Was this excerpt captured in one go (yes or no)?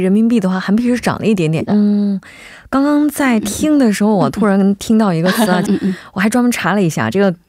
no